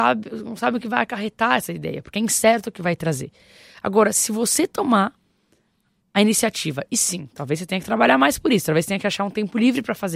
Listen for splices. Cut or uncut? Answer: uncut